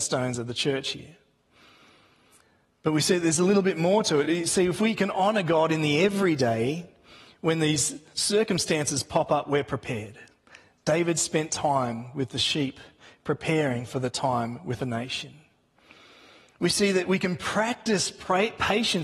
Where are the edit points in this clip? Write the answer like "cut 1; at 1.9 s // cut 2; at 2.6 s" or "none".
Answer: none